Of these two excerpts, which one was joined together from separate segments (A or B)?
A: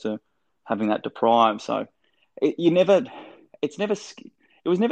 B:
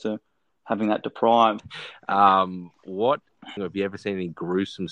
B